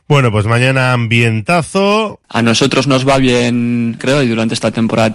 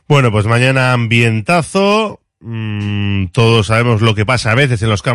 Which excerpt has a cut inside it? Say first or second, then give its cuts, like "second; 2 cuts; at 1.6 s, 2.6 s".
first; 2 cuts; at 2.2 s, 4.0 s